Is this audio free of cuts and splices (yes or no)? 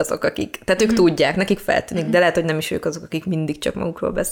yes